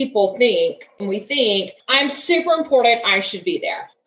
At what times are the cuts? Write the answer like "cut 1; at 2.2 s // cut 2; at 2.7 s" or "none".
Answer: cut 1; at 1.0 s